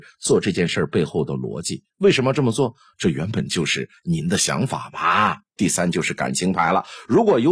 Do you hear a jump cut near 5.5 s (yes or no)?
yes